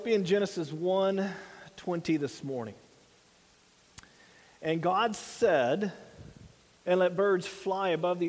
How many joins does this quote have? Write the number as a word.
one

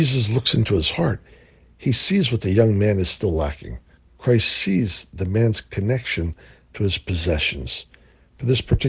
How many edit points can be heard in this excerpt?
one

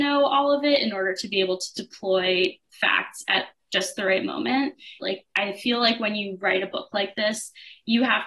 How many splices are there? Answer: one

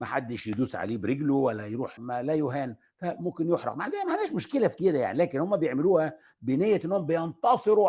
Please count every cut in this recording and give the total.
one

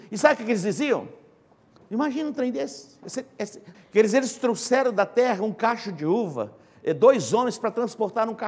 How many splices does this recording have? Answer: two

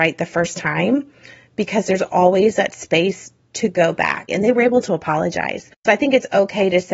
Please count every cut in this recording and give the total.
one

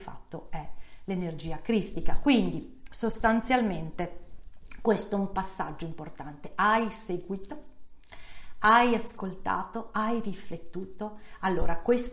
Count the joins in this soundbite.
zero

